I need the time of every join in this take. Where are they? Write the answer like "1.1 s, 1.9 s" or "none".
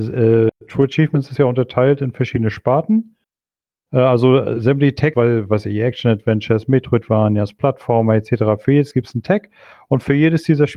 5.1 s